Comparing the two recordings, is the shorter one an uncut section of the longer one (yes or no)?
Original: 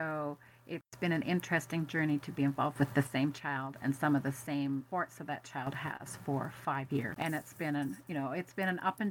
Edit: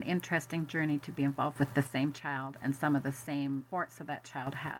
yes